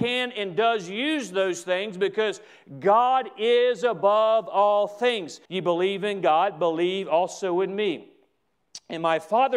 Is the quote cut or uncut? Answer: cut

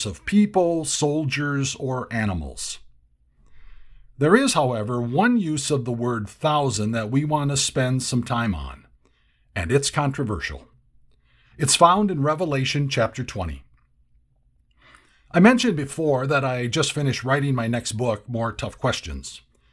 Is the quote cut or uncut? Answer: uncut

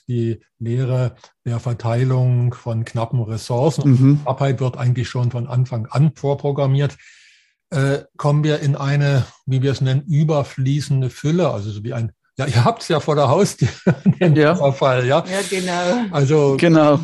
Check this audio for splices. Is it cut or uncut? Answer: uncut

